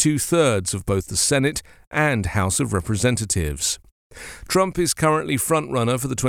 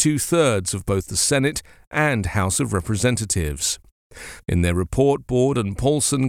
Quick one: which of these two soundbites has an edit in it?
second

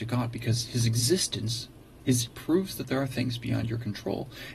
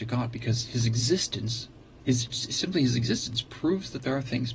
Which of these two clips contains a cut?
first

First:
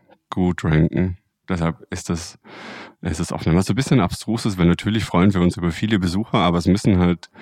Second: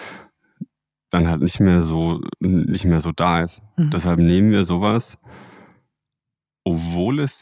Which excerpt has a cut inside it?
first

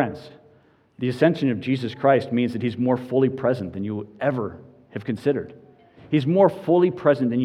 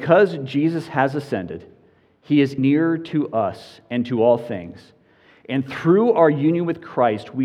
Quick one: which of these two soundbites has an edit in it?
second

